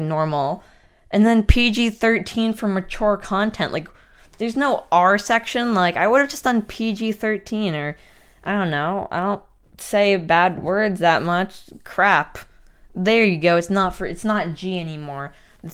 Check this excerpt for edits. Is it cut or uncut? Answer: uncut